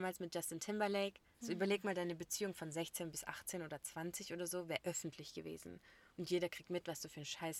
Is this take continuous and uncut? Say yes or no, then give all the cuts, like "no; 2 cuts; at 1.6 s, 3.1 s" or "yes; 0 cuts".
yes; 0 cuts